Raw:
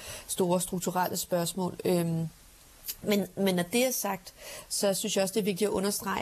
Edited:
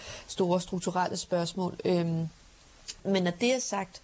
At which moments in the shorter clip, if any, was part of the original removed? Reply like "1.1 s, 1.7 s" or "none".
3.0 s